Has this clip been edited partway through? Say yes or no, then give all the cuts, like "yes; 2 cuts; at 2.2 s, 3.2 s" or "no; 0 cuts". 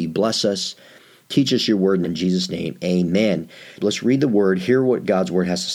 yes; 2 cuts; at 2.0 s, 3.8 s